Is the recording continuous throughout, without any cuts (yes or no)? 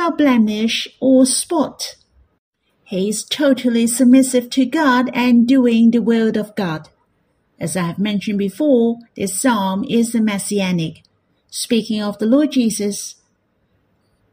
yes